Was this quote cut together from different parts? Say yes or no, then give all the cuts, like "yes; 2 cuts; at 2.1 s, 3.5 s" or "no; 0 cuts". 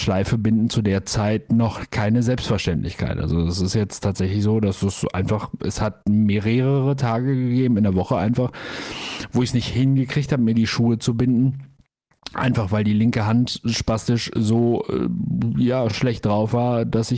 no; 0 cuts